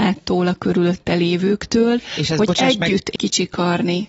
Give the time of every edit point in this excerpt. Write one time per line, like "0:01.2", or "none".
0:03.2